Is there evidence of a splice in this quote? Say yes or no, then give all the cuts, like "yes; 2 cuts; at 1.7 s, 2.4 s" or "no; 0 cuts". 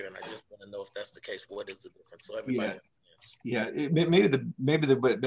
no; 0 cuts